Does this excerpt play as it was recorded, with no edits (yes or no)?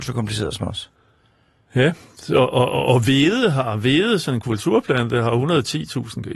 yes